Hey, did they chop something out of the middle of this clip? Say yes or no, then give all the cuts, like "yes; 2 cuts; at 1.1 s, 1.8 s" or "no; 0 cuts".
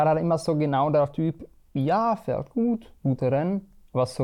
no; 0 cuts